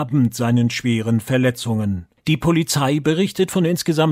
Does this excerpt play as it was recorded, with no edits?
no; 1 cut; at 2.2 s

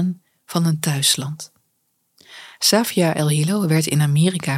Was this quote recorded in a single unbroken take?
yes; 0 cuts

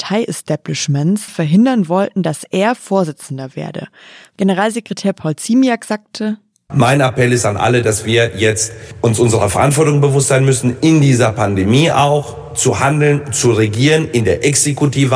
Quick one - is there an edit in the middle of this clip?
yes; 1 cut; at 1.3 s

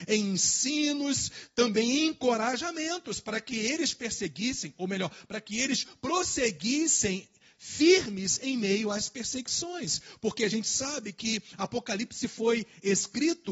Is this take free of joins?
yes; 0 cuts

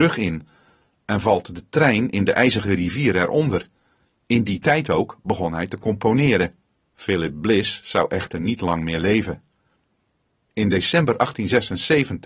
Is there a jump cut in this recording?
yes; 2 cuts; at 4.0 s, 6.8 s

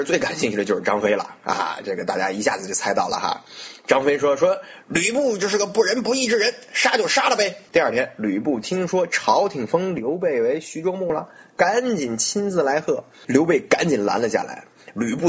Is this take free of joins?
no; 2 cuts; at 7.7 s, 13.2 s

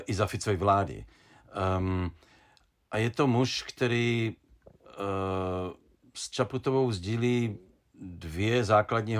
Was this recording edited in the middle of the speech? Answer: no; 0 cuts

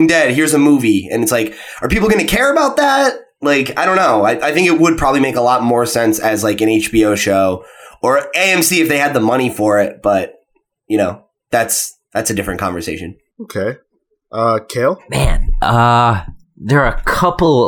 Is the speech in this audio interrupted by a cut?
no; 0 cuts

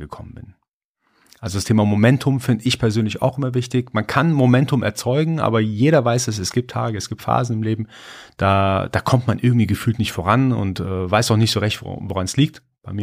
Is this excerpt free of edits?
yes; 0 cuts

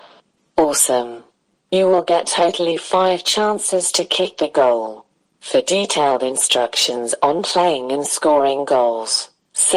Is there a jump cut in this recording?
no; 0 cuts

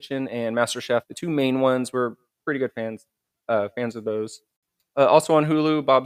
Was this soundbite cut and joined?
no; 0 cuts

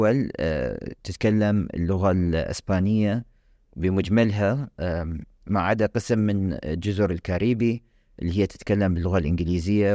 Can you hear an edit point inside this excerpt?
no; 0 cuts

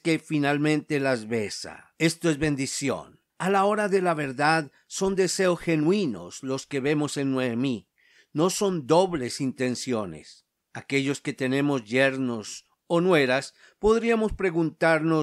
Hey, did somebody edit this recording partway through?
yes; 1 cut; at 3.3 s

